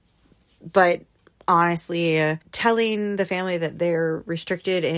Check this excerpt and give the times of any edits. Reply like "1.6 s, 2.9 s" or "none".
none